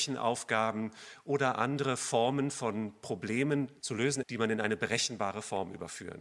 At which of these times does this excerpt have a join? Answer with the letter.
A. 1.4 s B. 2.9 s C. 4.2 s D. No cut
C